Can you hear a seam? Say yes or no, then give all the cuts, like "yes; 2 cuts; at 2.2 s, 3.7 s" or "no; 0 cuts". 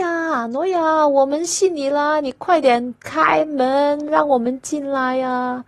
no; 0 cuts